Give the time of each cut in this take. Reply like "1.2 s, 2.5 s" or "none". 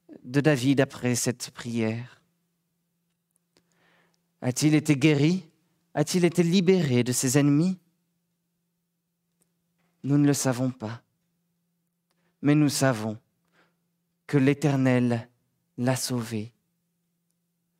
none

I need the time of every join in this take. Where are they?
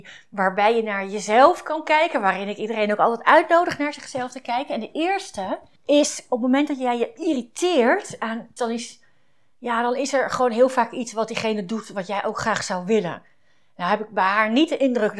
8.6 s

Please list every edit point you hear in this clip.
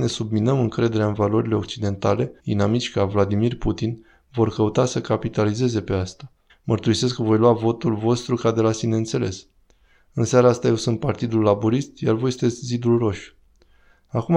2.4 s, 6.5 s

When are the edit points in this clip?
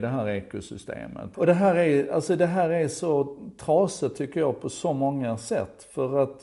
1.3 s

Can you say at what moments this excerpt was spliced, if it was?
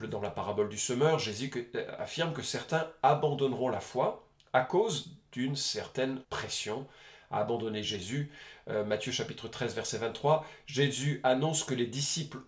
6.2 s

